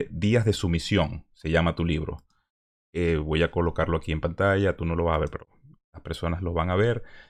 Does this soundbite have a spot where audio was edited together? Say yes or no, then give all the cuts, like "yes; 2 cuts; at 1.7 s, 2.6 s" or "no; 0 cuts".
yes; 1 cut; at 2.8 s